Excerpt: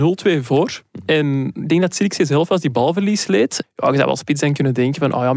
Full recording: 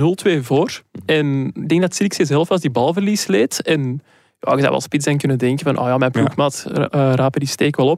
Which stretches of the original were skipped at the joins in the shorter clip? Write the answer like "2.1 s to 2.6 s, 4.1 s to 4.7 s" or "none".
3.6 s to 4.3 s